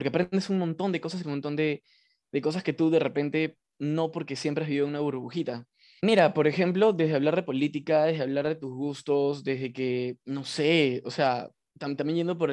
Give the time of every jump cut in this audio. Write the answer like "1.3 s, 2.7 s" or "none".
1.2 s, 6.0 s, 10.2 s